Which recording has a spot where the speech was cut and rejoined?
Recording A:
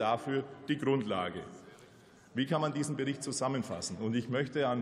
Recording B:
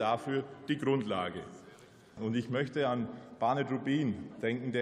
B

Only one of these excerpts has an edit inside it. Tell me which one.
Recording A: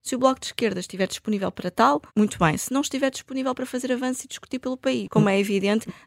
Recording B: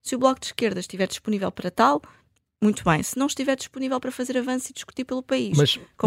A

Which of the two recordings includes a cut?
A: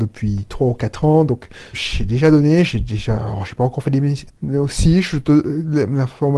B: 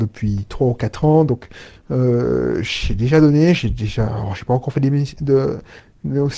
A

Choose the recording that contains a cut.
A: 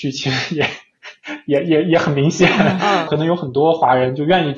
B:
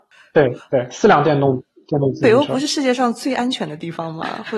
A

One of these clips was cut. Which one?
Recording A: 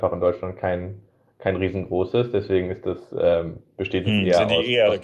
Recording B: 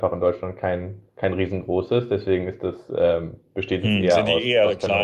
B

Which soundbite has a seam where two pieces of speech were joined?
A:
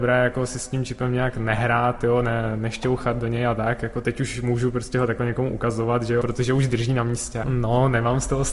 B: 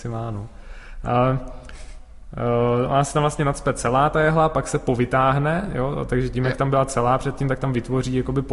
A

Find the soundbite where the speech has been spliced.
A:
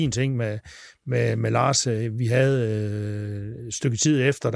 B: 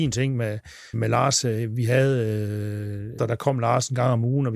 B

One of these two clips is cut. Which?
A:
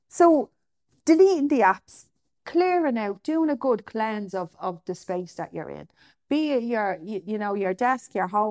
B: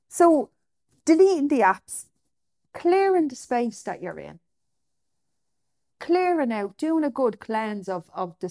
A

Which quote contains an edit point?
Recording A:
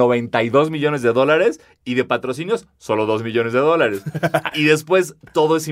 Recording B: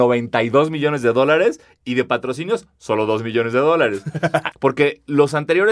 B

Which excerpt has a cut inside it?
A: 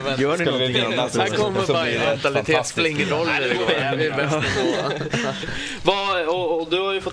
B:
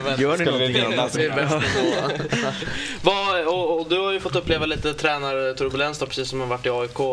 B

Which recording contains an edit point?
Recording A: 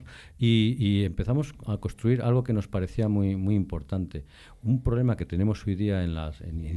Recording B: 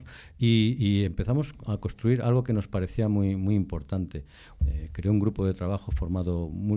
B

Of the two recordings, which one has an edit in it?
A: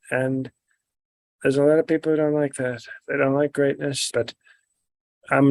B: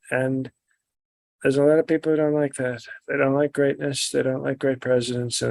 A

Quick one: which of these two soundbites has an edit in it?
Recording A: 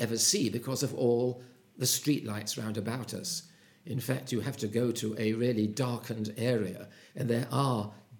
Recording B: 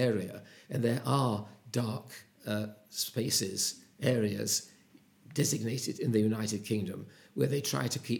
B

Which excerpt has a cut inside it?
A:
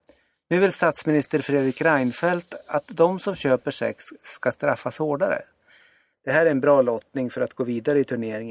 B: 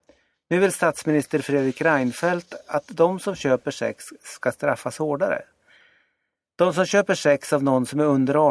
A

